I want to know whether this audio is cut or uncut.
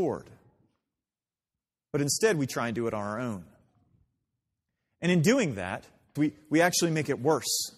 cut